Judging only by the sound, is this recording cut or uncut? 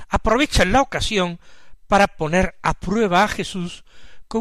uncut